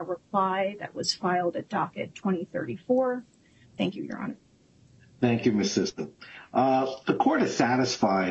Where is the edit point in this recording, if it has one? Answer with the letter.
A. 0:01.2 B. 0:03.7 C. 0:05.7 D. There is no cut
B